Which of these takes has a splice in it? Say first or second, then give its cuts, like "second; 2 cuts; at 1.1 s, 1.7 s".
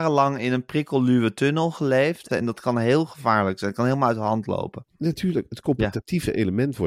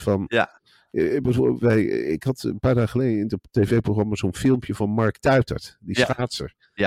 first; 1 cut; at 2.3 s